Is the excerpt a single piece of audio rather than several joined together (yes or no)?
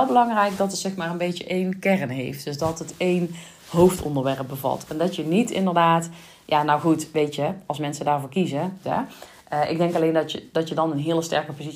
no